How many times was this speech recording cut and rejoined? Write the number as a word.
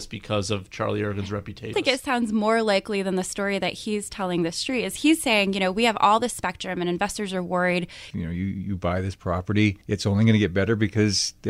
three